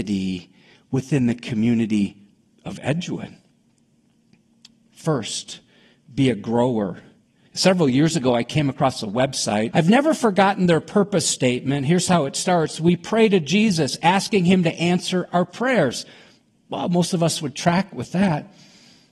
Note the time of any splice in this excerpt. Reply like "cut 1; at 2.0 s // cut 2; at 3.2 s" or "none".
cut 1; at 7.5 s // cut 2; at 9.7 s